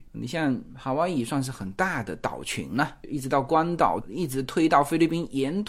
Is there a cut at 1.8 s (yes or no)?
no